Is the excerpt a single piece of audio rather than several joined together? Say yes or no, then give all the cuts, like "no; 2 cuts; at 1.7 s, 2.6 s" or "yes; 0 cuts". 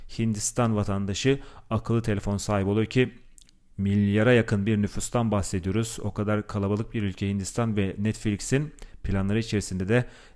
yes; 0 cuts